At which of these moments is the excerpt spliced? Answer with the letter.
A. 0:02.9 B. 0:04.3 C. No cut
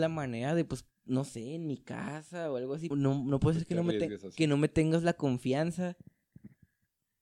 A